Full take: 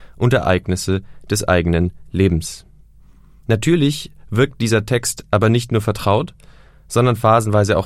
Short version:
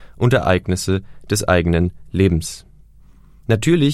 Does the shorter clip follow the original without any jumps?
yes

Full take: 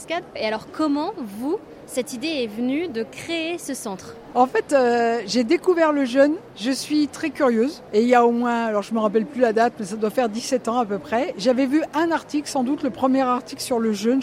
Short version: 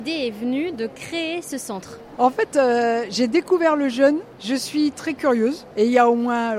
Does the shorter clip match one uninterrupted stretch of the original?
yes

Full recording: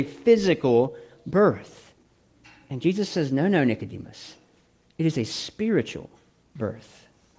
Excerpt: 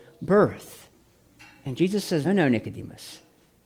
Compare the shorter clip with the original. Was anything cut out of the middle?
yes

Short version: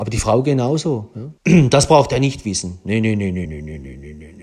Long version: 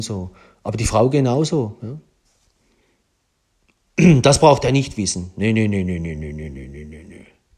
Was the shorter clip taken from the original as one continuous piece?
no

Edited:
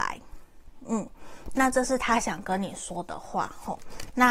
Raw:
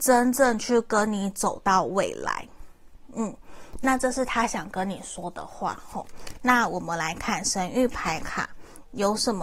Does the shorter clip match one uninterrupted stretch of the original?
yes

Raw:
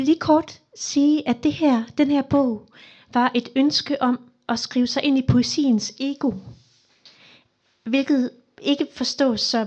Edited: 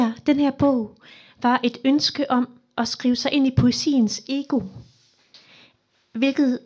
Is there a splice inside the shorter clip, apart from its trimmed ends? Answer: no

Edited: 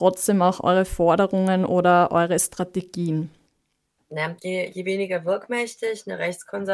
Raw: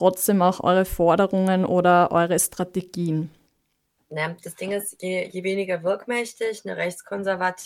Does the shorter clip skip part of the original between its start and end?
yes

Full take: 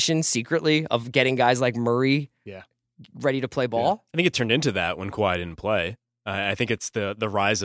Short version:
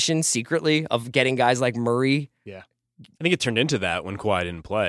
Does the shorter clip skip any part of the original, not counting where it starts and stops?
yes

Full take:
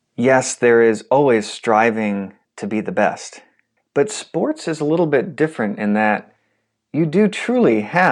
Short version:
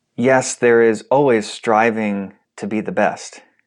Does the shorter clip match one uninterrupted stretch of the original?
yes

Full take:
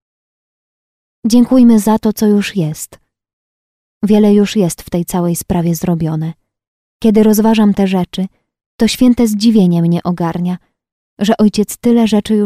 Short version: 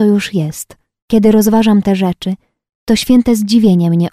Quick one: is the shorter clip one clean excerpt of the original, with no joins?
no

